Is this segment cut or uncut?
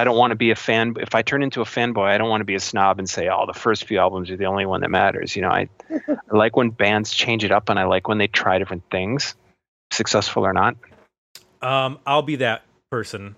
uncut